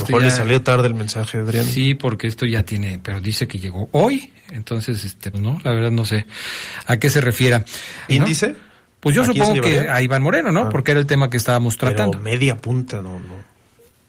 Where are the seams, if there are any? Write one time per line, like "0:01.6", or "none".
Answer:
0:05.3
0:08.1